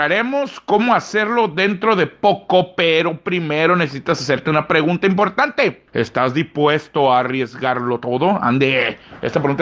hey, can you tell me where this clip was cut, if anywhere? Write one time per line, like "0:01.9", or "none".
0:05.9

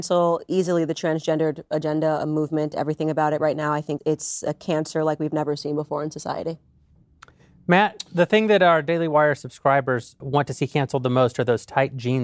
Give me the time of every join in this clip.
0:04.0
0:10.2

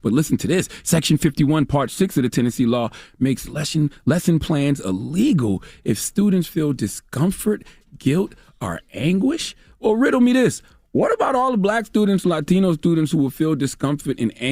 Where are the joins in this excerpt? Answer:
none

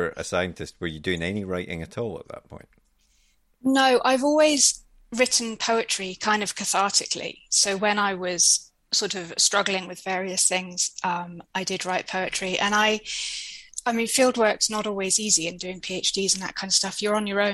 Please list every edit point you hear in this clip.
none

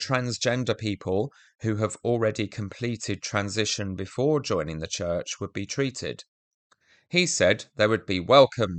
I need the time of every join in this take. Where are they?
none

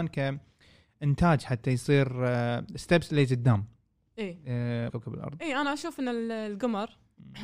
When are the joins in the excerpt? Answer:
0:04.9

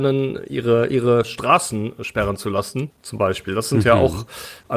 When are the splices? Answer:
0:02.9

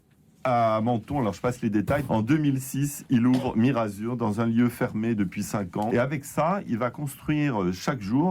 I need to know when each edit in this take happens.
0:02.1
0:05.9

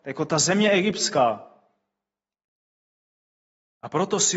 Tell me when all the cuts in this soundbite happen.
none

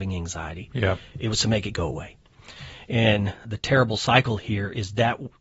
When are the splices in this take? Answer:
none

